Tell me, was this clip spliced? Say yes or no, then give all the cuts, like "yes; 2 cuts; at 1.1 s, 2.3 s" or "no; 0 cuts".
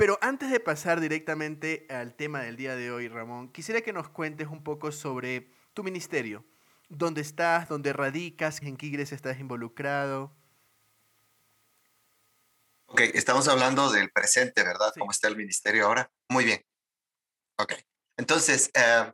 yes; 1 cut; at 8.6 s